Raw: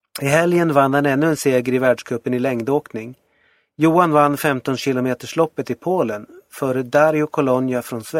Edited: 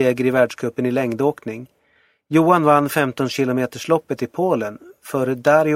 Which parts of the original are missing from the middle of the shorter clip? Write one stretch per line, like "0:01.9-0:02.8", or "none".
none